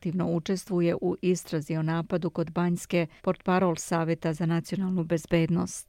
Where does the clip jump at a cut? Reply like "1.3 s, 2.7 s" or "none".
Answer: 3.2 s